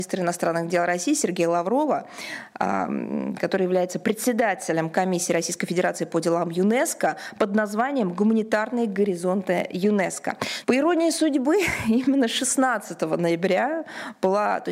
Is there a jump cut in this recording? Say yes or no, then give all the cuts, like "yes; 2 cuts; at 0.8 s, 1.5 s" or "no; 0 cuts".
yes; 1 cut; at 10.6 s